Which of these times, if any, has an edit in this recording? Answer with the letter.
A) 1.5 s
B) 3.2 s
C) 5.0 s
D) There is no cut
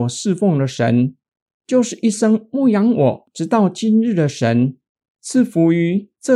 C